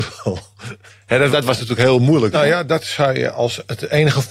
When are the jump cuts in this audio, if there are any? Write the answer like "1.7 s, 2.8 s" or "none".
1.3 s, 2.3 s